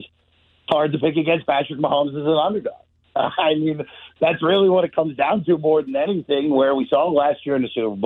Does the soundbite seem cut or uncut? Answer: uncut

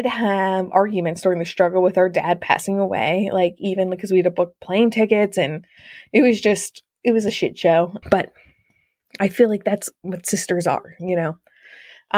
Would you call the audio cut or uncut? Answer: cut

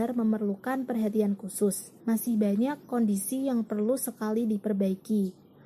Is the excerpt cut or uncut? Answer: cut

